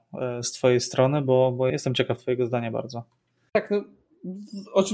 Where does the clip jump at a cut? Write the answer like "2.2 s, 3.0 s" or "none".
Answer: 1.7 s